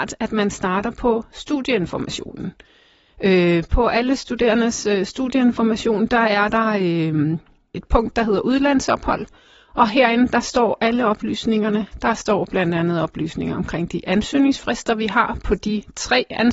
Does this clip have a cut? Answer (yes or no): no